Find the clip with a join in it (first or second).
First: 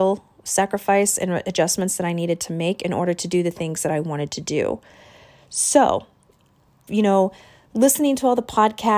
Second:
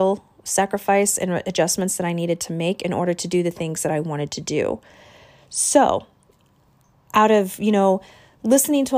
first